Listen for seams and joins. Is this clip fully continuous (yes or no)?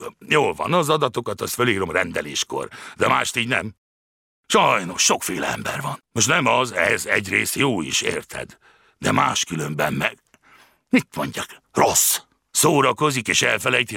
yes